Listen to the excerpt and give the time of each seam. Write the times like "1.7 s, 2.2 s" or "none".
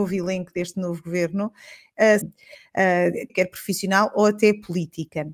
2.2 s, 3.3 s